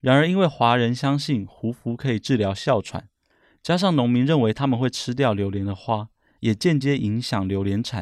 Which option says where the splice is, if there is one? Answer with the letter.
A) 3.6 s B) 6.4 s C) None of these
B